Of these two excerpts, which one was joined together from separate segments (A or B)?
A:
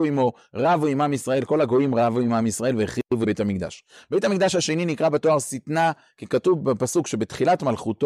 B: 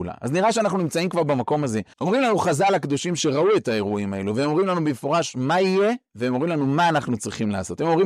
B